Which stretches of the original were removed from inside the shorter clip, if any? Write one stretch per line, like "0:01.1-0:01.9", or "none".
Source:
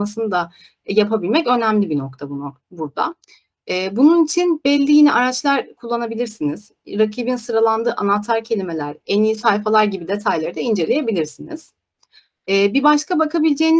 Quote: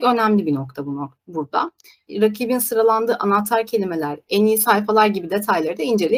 0:03.5-0:06.8